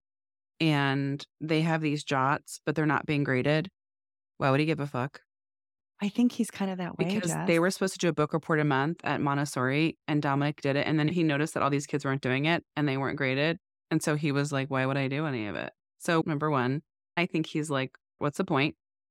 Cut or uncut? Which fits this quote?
uncut